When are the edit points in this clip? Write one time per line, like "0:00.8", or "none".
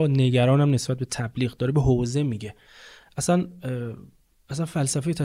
none